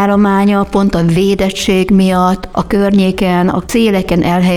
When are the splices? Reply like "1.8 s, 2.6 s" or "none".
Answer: none

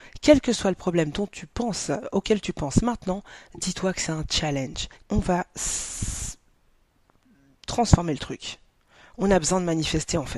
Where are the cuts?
5.0 s

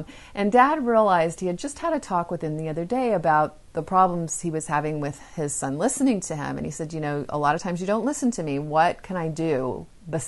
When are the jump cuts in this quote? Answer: none

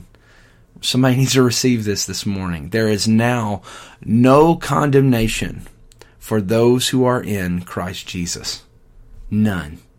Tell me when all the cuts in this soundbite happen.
none

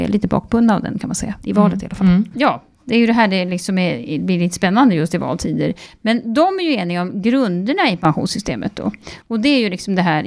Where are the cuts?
2.3 s

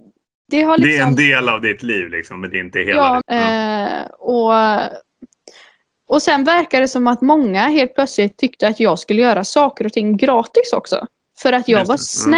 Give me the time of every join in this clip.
3.2 s, 11.3 s

